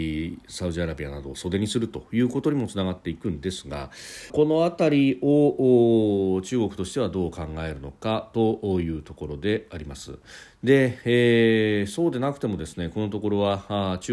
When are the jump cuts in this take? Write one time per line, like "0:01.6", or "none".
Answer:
0:04.3